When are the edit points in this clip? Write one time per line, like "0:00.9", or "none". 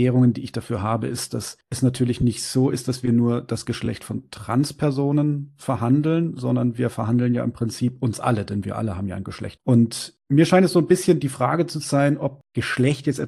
0:09.6